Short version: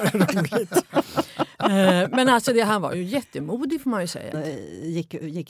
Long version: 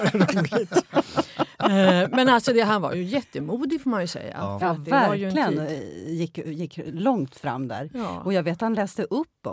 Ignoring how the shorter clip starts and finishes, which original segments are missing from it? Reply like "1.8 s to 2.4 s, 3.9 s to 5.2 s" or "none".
4.3 s to 5.6 s